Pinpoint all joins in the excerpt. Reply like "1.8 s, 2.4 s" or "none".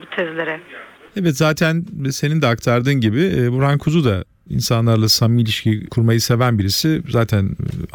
none